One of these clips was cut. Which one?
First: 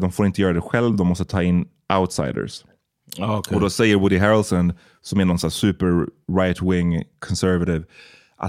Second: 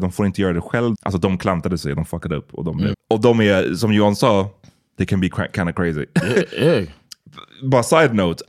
second; 2 cuts; at 0.9 s, 2.9 s

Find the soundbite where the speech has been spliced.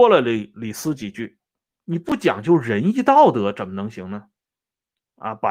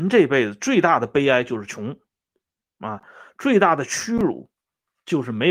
first; 1 cut; at 1.7 s

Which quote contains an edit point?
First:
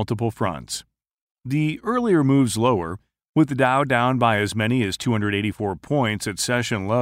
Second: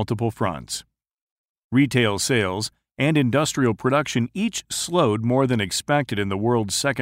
first; 1 cut; at 1.3 s

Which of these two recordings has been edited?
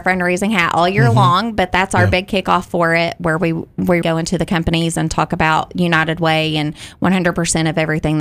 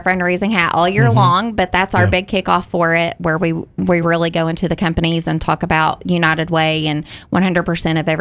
first; 1 cut; at 4.0 s

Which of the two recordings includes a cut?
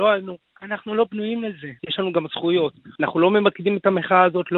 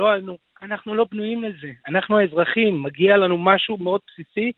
first; 2 cuts; at 1.8 s, 3.0 s

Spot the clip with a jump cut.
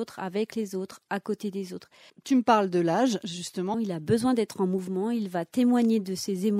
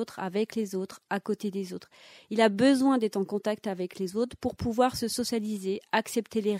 first; 2 cuts; at 2.1 s, 3.7 s

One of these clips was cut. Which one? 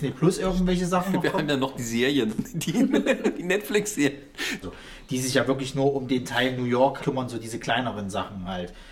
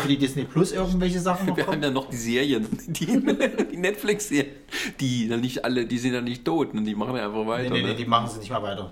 first; 2 cuts; at 4.6 s, 7.0 s

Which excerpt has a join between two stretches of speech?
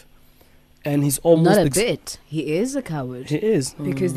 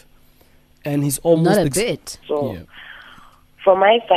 second; 1 cut; at 2.2 s

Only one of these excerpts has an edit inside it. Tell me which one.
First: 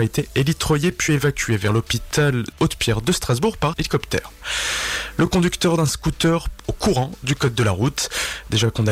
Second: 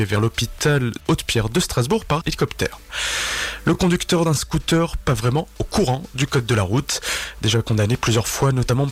first; 1 cut; at 6.6 s

